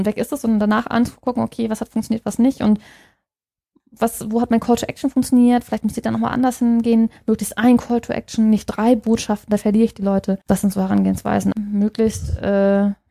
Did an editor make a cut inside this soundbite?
yes; 2 cuts; at 10.4 s, 11.5 s

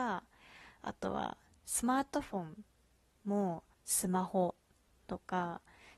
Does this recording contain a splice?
yes; 1 cut; at 3.7 s

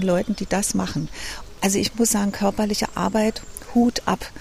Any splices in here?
yes; 1 cut; at 1.6 s

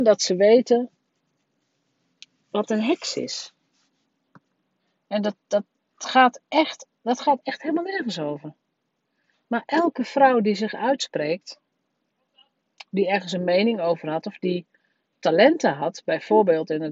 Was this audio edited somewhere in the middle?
no; 0 cuts

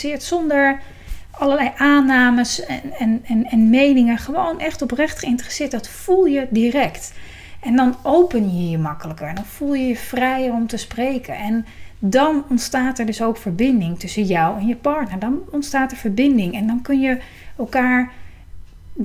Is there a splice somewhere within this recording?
no; 0 cuts

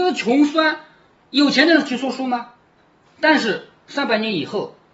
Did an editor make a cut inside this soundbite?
yes; 1 cut; at 3.1 s

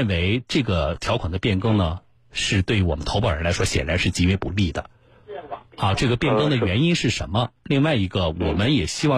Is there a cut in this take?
yes; 1 cut; at 5.7 s

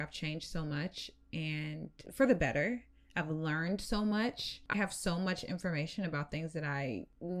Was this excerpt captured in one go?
no; 1 cut; at 4.7 s

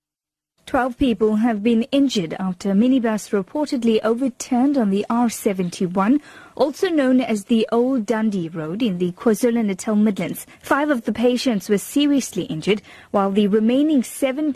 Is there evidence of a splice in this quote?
yes; 1 cut; at 10.5 s

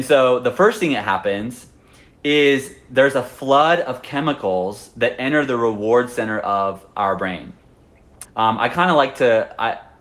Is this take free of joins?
no; 1 cut; at 8.3 s

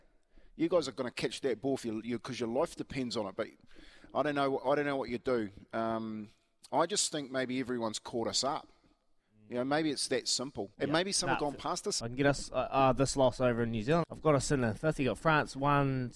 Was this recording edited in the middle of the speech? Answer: yes; 3 cuts; at 10.7 s, 12.0 s, 14.0 s

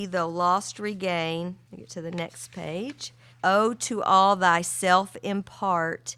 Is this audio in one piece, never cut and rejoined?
no; 2 cuts; at 1.6 s, 3.3 s

